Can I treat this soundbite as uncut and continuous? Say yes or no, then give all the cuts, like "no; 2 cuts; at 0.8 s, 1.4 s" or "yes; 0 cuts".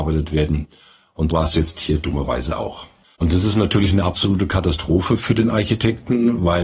no; 2 cuts; at 1.3 s, 3.0 s